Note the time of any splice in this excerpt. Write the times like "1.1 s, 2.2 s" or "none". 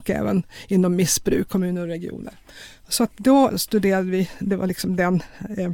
1.5 s, 3.5 s